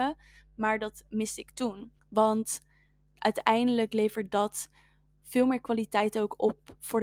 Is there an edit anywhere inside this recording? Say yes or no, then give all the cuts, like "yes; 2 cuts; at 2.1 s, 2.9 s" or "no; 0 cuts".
yes; 1 cut; at 2.0 s